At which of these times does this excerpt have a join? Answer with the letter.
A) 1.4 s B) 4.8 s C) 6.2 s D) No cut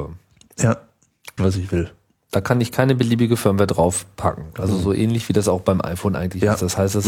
A